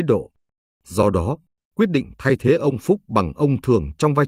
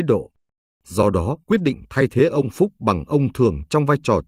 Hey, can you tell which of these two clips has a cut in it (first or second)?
second